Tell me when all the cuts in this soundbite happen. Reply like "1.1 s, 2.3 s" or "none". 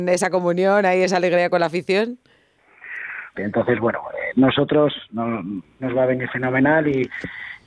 3.3 s, 5.8 s